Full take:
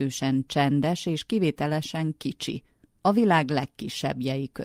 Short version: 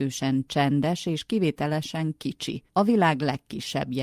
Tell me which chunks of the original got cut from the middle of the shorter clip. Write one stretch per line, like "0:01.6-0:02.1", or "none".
0:02.7-0:03.0